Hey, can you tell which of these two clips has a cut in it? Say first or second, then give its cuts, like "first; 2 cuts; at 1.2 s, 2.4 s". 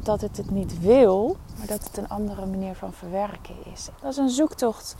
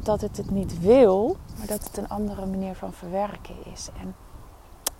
first; 1 cut; at 3.9 s